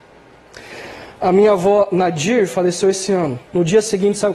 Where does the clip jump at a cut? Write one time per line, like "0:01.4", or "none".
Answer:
0:03.4